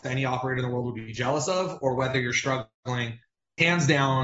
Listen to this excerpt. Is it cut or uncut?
uncut